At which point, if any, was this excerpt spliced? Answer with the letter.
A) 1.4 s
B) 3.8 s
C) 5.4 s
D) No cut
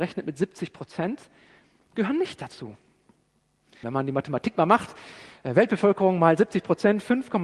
B